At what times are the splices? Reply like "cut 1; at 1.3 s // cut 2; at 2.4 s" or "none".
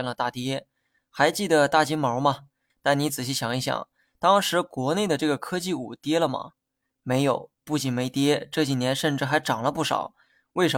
cut 1; at 2.7 s